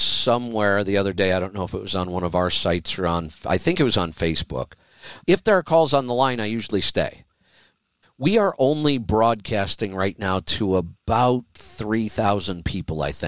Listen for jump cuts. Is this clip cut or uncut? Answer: cut